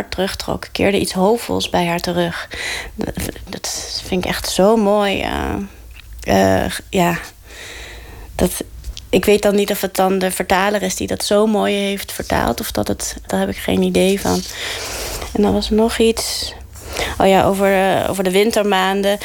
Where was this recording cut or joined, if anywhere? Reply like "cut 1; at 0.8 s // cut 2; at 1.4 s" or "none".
cut 1; at 3.5 s // cut 2; at 13.3 s